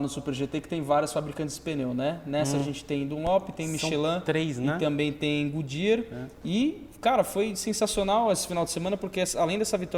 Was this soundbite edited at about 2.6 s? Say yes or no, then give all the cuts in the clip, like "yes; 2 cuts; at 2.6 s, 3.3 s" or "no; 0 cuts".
no; 0 cuts